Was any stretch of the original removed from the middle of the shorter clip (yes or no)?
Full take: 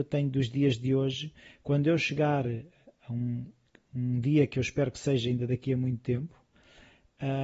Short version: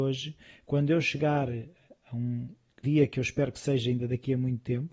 yes